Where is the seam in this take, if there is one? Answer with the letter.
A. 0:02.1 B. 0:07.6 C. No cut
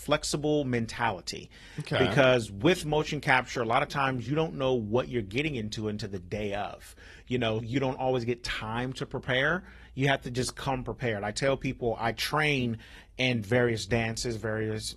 B